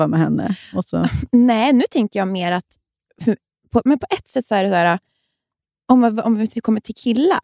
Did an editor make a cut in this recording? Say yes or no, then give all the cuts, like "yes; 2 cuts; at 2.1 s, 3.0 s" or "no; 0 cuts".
no; 0 cuts